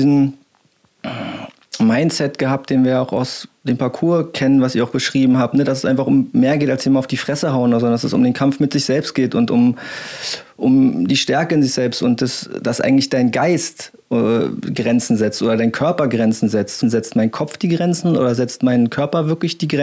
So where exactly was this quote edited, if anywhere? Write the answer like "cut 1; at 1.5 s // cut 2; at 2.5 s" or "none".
cut 1; at 16.8 s